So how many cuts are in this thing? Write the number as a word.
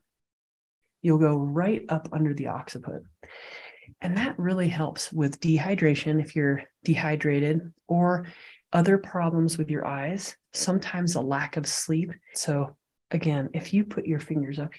two